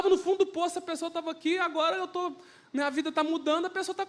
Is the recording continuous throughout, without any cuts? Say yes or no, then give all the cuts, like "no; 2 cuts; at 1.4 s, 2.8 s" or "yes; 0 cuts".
yes; 0 cuts